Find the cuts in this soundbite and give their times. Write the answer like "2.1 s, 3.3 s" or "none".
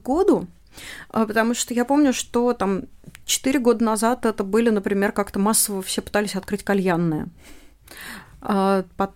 none